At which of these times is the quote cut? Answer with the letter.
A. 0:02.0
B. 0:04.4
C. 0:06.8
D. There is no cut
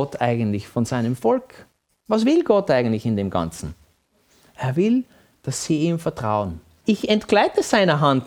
C